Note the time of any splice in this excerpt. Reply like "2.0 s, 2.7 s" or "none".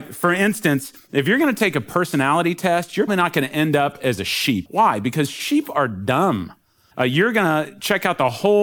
3.1 s, 4.7 s, 6.9 s